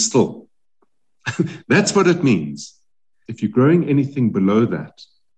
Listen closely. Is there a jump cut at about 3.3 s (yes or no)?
yes